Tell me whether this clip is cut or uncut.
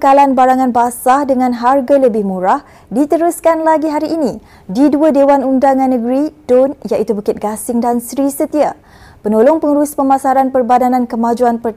uncut